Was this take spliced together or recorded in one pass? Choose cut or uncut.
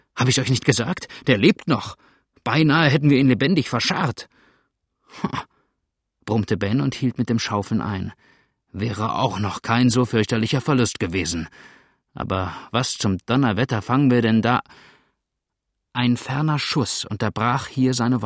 uncut